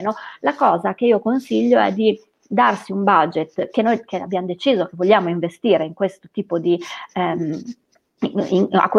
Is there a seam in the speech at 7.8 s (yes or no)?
no